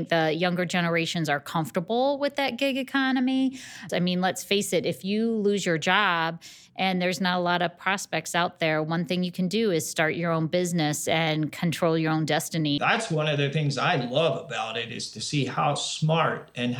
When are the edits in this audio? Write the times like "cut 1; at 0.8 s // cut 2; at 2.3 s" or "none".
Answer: cut 1; at 3.9 s // cut 2; at 12.8 s